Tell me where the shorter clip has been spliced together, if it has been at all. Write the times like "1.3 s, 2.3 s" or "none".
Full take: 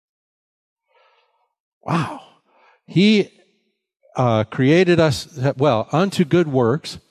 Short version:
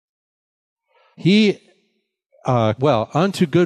1.1 s, 2.8 s